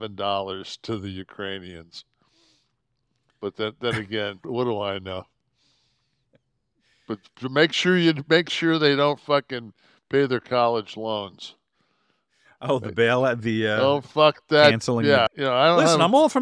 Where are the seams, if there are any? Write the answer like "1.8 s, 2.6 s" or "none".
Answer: 4.4 s, 15.3 s